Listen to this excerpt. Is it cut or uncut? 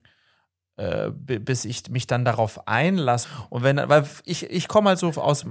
cut